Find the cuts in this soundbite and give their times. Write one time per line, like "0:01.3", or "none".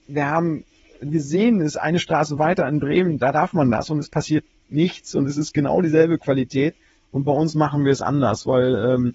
none

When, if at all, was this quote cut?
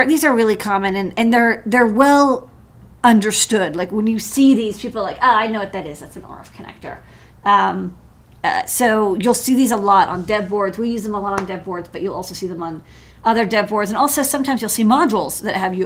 none

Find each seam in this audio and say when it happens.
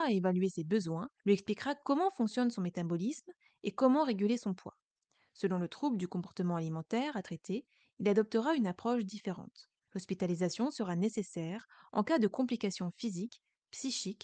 0:01.2
0:09.9

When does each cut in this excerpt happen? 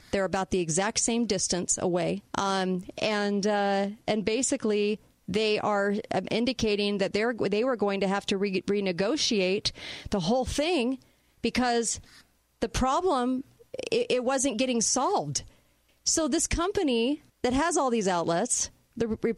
0:02.3
0:15.9
0:17.3

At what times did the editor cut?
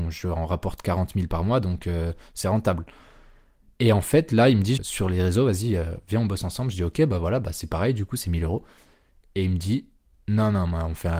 0:04.8

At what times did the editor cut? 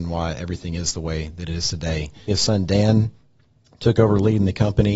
0:02.3

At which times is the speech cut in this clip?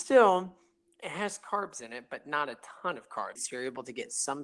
0:03.4

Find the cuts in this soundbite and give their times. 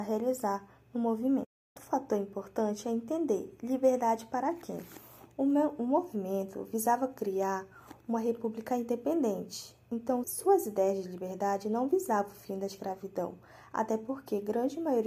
0:10.2

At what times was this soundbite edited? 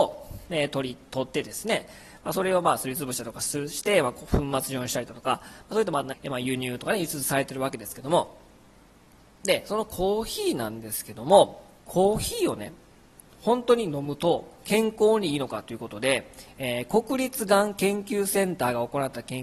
0:06.1
0:11.8

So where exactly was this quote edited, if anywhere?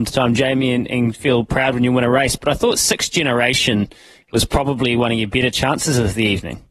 none

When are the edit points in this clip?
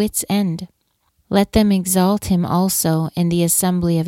0:01.1

